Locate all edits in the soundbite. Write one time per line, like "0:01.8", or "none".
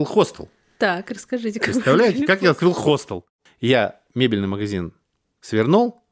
0:03.5